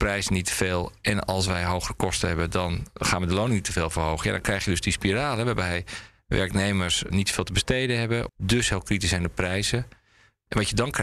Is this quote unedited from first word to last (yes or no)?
no